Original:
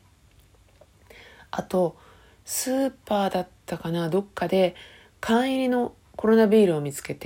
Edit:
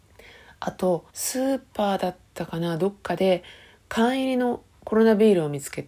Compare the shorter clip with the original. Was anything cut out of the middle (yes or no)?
yes